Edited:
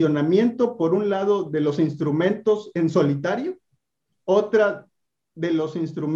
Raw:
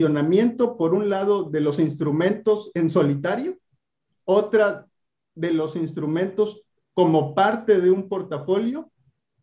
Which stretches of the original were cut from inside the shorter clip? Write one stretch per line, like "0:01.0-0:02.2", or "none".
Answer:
none